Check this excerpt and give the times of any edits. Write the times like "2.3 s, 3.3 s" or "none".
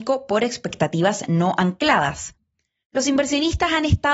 none